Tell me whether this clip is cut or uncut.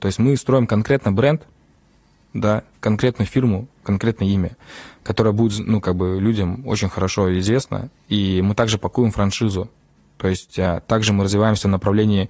uncut